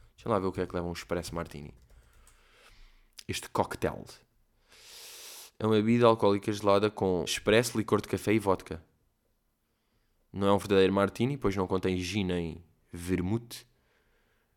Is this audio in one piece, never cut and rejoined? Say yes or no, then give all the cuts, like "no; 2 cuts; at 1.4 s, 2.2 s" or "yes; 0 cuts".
no; 1 cut; at 7.3 s